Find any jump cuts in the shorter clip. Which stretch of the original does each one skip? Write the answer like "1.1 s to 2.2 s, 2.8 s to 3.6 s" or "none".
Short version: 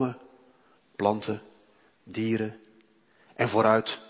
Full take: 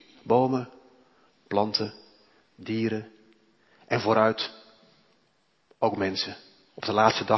none